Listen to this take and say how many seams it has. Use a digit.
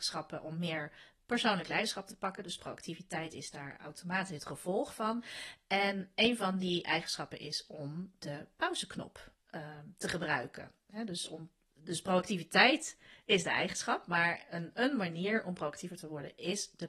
0